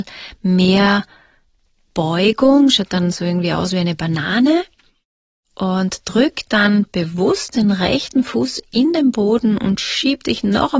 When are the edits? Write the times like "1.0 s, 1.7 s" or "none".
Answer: none